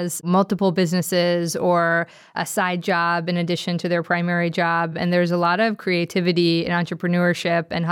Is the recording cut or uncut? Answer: uncut